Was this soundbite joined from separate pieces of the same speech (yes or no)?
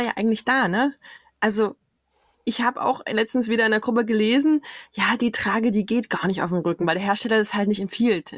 no